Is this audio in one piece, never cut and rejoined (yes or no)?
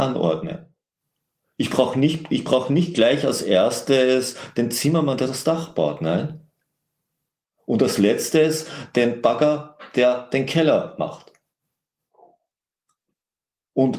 yes